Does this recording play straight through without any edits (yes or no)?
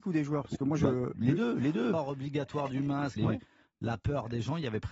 no